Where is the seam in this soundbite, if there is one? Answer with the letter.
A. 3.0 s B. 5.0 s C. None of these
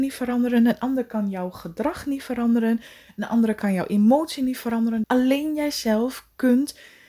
B